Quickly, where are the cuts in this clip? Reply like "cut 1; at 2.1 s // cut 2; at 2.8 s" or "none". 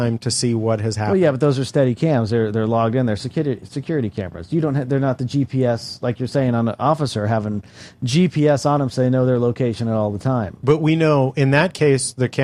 none